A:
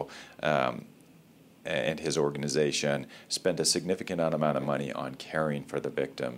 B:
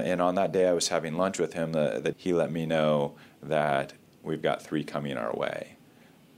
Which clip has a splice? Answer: B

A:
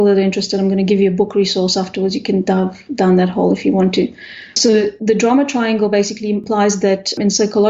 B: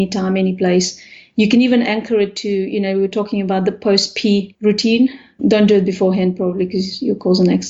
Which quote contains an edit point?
B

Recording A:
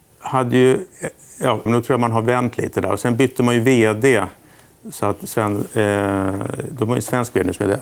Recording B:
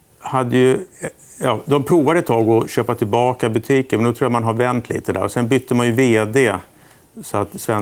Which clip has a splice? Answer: A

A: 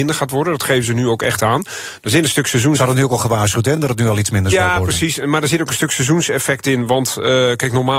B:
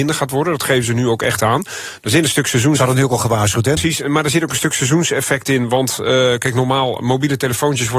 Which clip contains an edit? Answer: B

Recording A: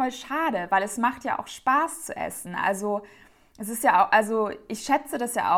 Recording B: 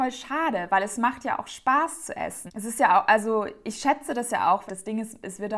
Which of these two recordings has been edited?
B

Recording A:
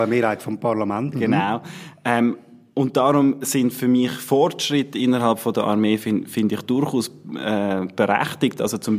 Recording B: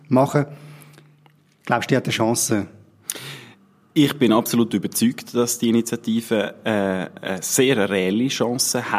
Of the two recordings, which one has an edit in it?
A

